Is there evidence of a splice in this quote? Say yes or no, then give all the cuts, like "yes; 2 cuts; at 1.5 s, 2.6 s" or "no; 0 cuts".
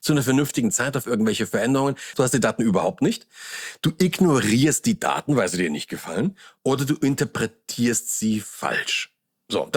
yes; 1 cut; at 2.1 s